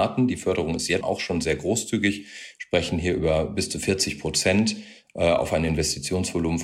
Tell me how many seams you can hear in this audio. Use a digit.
1